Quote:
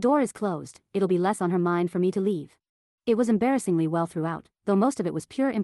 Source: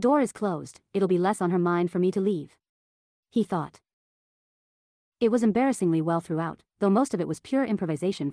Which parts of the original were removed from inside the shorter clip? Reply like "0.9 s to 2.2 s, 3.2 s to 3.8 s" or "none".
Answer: 2.9 s to 5.1 s